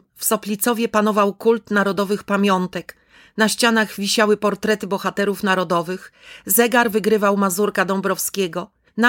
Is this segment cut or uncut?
uncut